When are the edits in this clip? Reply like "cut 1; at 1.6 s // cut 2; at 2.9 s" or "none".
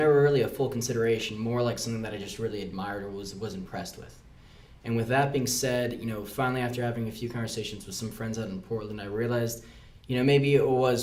none

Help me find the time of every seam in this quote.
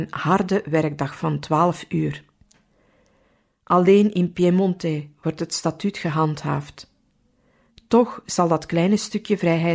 none

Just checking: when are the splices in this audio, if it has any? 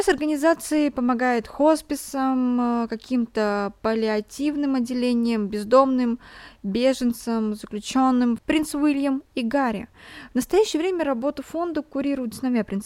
cut 1; at 8.4 s

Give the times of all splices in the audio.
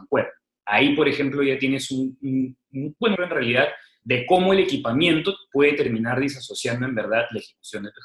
cut 1; at 3.2 s

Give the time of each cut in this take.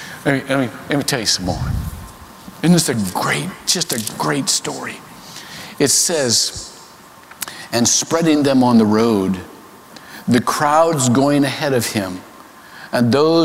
none

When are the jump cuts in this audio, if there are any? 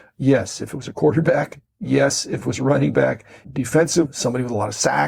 cut 1; at 3.4 s

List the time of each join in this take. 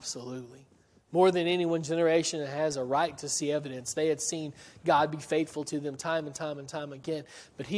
none

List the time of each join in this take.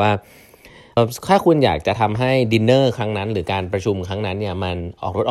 cut 1; at 1.0 s

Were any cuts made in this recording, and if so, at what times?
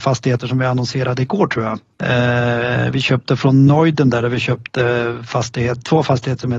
cut 1; at 1.9 s

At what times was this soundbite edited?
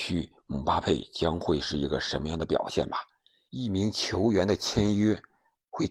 cut 1; at 3.5 s

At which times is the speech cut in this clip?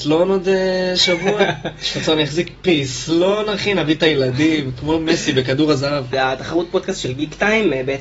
cut 1; at 6.1 s

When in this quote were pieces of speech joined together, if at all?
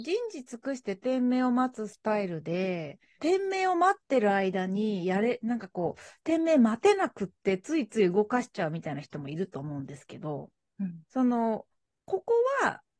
cut 1; at 3.2 s // cut 2; at 11.0 s

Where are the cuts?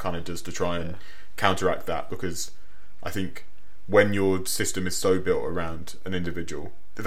none

